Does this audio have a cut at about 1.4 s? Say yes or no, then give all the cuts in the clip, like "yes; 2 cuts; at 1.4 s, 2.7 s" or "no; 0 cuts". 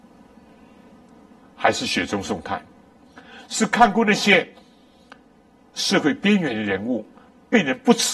yes; 1 cut; at 1.4 s